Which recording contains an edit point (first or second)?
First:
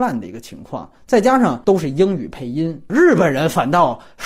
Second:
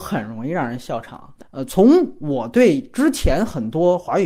second